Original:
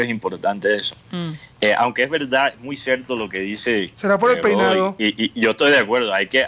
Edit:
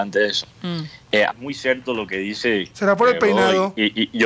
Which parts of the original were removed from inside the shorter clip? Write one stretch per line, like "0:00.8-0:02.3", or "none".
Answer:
0:01.8-0:02.5